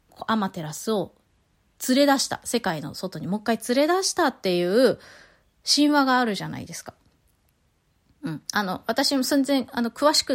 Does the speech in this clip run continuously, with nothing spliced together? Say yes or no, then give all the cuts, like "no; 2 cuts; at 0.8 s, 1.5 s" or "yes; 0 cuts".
yes; 0 cuts